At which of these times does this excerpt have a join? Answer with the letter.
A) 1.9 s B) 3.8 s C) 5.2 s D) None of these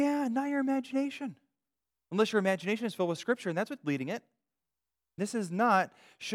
C